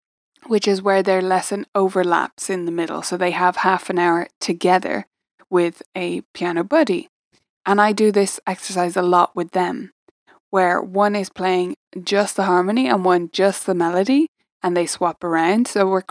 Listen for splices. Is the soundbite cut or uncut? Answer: uncut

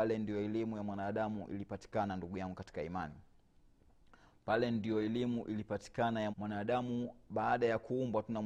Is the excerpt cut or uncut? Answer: cut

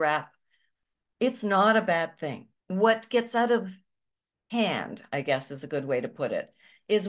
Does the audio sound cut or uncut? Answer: cut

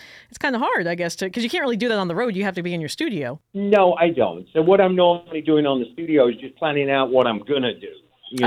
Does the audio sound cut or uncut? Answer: uncut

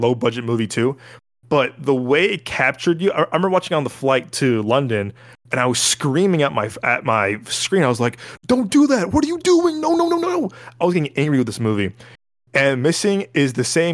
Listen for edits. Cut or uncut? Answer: uncut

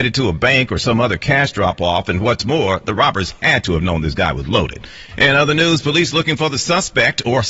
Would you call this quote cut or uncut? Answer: cut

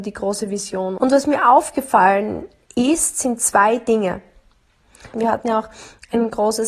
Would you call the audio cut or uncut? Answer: cut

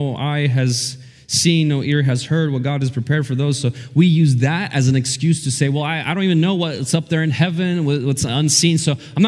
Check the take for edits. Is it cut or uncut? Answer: uncut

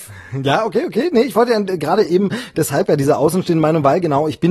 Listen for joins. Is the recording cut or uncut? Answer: uncut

